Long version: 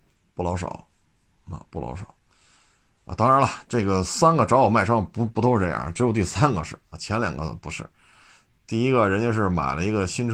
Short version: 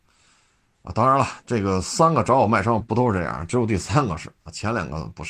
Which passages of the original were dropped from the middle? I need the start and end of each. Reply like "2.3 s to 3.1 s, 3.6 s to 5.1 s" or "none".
5.0 s to 5.3 s